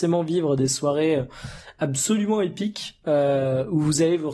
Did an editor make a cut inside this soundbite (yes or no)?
no